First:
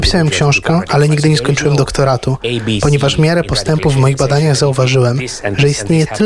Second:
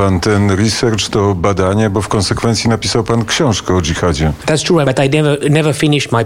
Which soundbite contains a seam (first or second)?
second